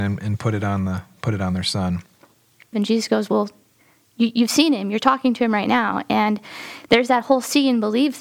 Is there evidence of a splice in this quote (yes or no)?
yes